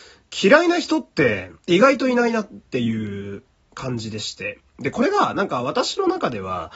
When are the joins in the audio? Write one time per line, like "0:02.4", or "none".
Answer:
0:01.6